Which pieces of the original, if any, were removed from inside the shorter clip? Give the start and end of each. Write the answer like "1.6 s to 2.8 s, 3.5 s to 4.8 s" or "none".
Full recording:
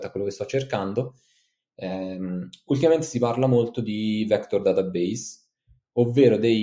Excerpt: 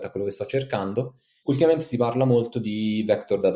1.4 s to 2.6 s